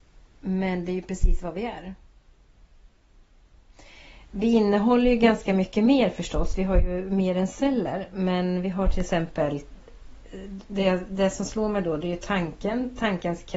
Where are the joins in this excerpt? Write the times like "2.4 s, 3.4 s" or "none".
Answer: none